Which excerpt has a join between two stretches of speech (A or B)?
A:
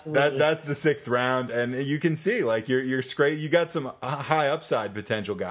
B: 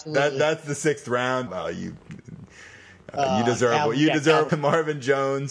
B